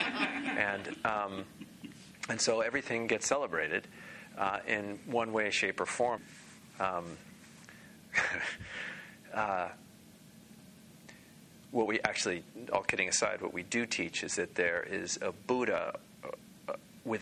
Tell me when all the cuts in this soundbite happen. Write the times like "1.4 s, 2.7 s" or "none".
6.2 s